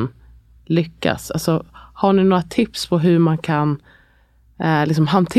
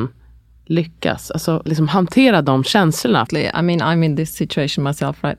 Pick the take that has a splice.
second; 2 cuts; at 1.7 s, 3.3 s

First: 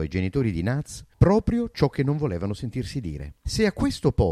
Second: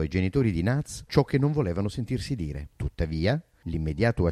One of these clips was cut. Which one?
second; 2 cuts; at 1.1 s, 2.7 s

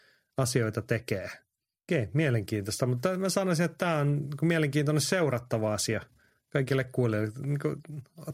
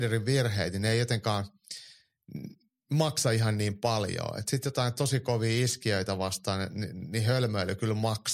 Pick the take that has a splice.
first; 1 cut; at 1.8 s

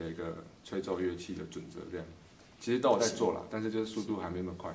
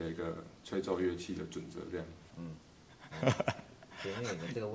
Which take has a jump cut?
second; 1 cut; at 2.3 s

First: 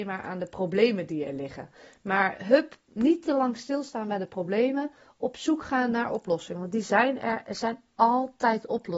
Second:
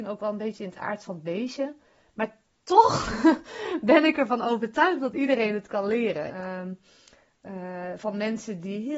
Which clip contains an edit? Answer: second; 1 cut; at 6.3 s

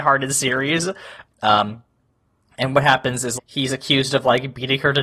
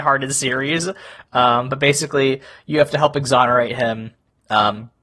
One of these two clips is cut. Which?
first; 2 cuts; at 1.3 s, 3.4 s

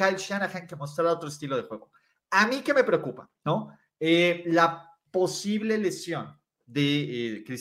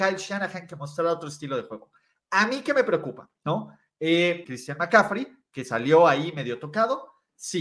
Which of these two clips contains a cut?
second; 1 cut; at 4.4 s

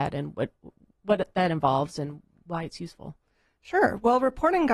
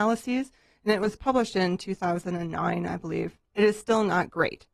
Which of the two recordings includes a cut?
second; 1 cut; at 3.5 s

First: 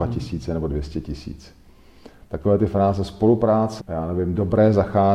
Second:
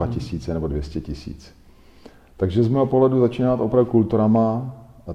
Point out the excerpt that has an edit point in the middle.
first; 2 cuts; at 2.2 s, 3.8 s

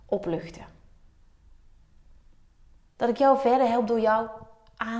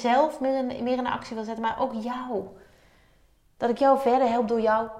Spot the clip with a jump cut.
first; 1 cut; at 2.9 s

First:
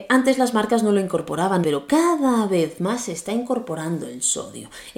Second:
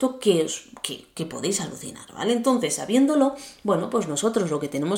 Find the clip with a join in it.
first; 1 cut; at 1.6 s

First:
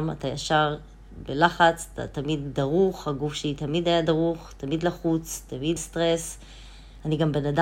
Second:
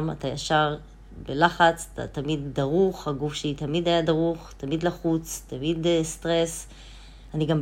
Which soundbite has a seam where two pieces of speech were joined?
first; 1 cut; at 5.8 s

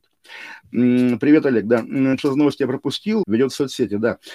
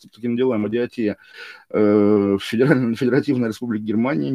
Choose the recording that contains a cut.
first; 2 cuts; at 2.2 s, 3.2 s

